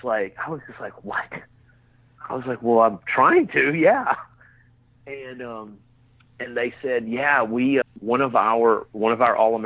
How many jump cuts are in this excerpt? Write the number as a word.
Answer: one